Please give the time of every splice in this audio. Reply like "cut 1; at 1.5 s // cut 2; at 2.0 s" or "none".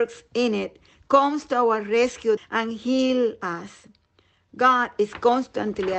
cut 1; at 2.4 s